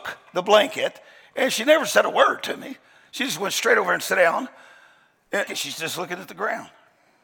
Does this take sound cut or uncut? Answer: cut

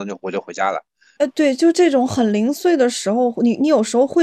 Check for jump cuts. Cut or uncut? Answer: cut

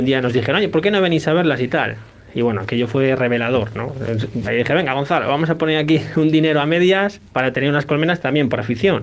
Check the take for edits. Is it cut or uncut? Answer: cut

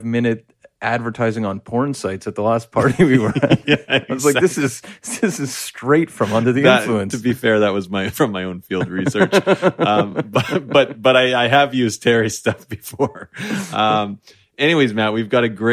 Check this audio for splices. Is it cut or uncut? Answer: uncut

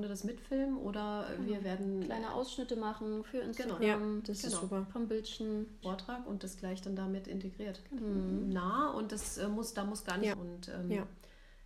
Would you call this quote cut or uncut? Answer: cut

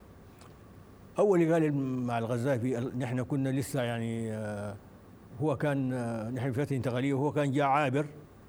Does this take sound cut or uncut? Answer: uncut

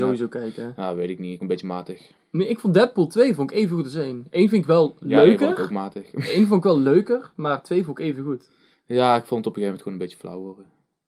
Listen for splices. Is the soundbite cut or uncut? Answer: cut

